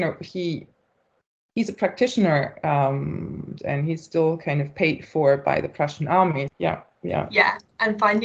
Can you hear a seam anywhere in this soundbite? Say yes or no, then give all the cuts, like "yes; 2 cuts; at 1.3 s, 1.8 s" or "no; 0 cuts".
yes; 2 cuts; at 3.6 s, 6.5 s